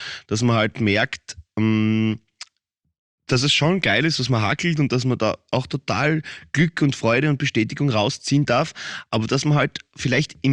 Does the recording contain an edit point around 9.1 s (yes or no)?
no